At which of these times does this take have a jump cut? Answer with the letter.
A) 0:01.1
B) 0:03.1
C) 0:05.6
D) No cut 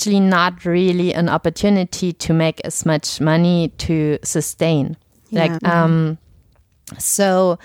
C